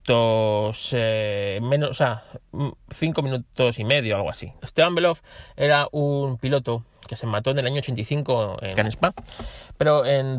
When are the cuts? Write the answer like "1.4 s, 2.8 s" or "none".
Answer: 4.6 s, 8.8 s